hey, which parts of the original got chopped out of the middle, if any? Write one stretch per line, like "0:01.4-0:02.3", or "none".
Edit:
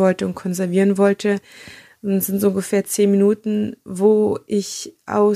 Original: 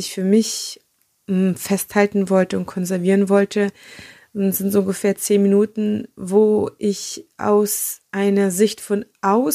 none